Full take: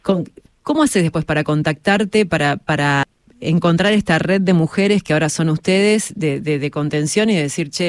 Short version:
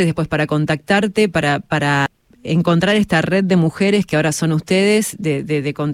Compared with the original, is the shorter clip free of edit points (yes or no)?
yes